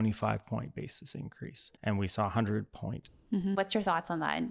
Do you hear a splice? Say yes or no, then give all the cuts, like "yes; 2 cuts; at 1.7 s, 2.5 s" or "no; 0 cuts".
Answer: yes; 2 cuts; at 1.8 s, 3.5 s